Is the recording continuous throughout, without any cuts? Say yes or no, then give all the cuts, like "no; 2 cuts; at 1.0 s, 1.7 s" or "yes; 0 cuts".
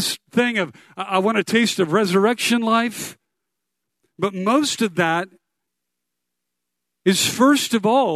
yes; 0 cuts